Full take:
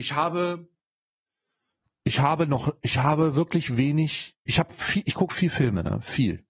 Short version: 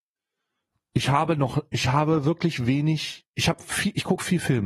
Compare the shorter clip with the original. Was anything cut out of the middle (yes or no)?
no